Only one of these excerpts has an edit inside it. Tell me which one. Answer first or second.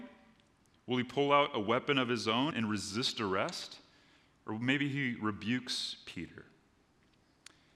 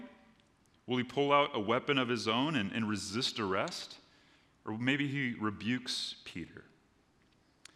first